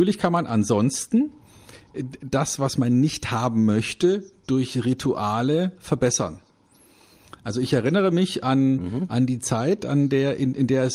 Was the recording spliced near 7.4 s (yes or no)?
no